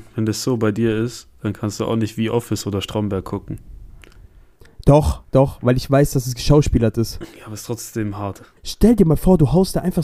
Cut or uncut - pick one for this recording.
cut